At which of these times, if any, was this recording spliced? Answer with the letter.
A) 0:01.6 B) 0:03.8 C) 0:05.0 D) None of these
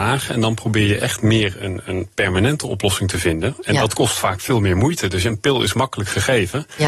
D